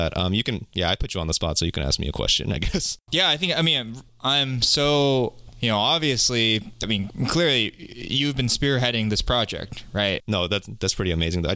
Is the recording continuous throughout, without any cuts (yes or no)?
no